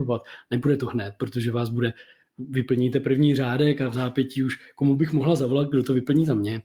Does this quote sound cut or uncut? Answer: uncut